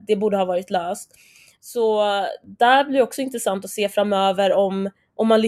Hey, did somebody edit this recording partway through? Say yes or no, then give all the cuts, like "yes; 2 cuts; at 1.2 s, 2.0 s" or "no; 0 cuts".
no; 0 cuts